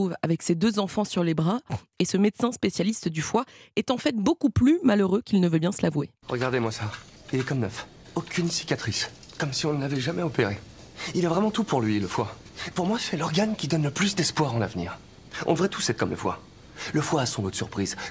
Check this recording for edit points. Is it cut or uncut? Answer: uncut